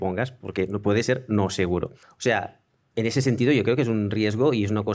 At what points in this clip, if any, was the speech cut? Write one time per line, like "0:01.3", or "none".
0:02.0